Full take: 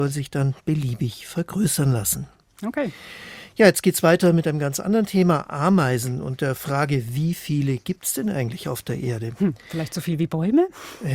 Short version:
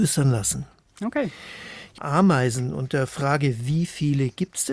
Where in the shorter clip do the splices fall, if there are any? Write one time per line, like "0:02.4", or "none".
0:02.0